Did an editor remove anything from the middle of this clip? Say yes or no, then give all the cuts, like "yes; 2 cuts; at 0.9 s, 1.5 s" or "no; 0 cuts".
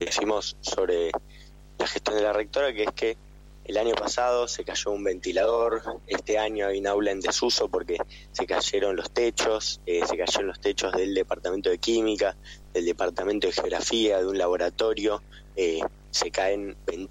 no; 0 cuts